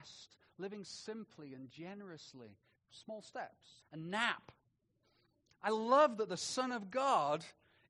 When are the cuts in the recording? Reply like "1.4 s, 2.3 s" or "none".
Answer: 2.8 s, 3.8 s